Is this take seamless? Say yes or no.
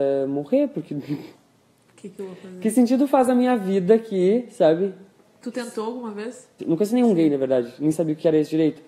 no